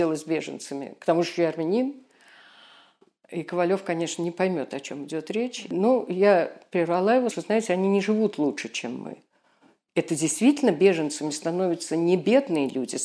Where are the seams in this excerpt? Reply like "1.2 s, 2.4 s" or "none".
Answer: 7.3 s